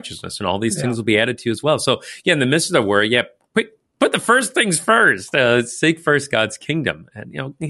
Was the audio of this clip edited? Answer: no; 0 cuts

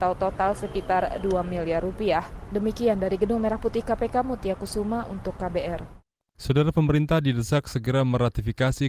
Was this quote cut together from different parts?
no; 0 cuts

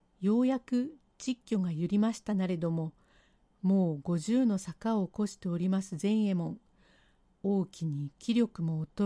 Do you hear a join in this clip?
no; 0 cuts

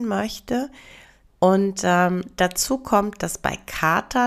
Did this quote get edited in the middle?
yes; 1 cut; at 1.3 s

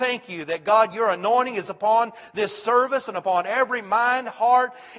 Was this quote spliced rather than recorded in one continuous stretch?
no; 0 cuts

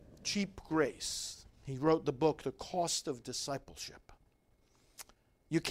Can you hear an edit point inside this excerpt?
no; 0 cuts

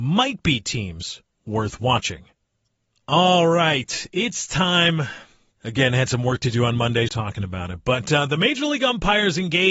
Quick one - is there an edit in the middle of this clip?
yes; 2 cuts; at 5.5 s, 7.1 s

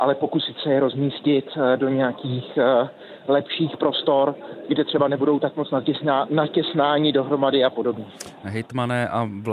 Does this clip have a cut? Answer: no; 0 cuts

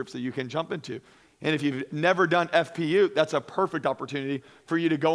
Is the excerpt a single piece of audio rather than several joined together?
yes; 0 cuts

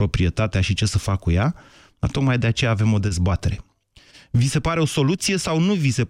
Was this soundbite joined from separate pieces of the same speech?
no; 0 cuts

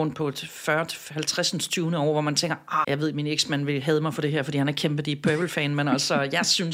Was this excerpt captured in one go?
no; 1 cut; at 2.8 s

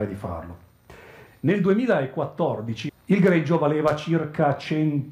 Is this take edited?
yes; 2 cuts; at 1.3 s, 2.9 s

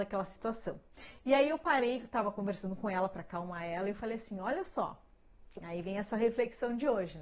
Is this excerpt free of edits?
yes; 0 cuts

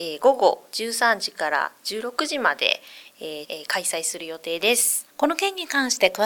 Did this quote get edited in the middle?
yes; 2 cuts; at 3.4 s, 5.1 s

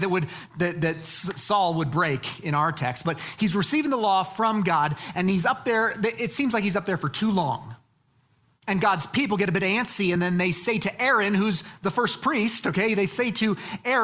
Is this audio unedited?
yes; 0 cuts

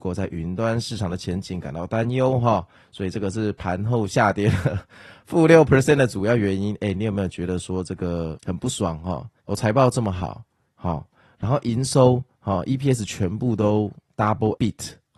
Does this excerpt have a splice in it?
yes; 2 cuts; at 9.4 s, 10.7 s

